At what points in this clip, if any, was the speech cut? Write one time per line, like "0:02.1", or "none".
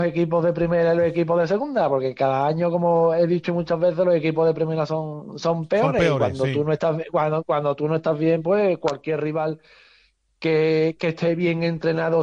none